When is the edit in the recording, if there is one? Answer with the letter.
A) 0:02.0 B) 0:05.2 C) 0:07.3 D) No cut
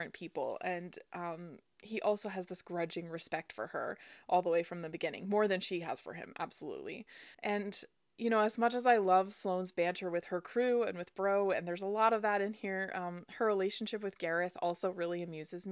C